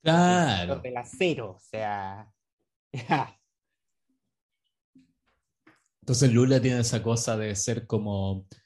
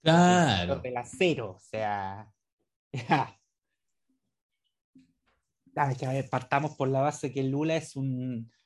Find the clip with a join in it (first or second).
second